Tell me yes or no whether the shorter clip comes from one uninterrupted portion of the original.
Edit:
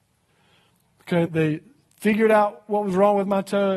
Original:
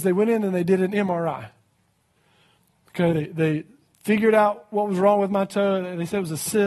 no